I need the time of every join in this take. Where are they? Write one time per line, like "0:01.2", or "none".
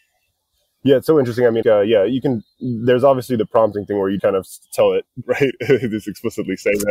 0:01.6
0:04.2
0:05.2